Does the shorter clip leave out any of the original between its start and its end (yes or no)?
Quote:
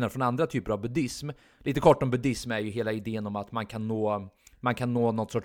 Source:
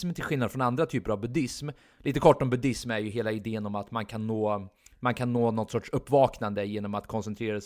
no